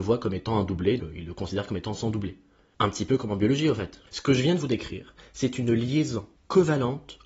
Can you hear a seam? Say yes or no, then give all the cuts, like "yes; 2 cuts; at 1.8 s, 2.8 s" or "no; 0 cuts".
yes; 2 cuts; at 1.0 s, 4.1 s